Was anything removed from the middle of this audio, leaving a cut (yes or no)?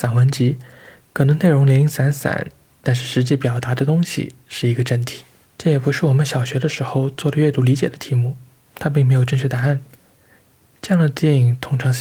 yes